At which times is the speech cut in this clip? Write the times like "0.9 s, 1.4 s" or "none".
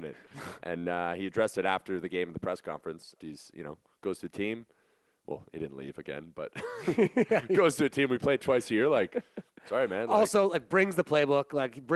3.2 s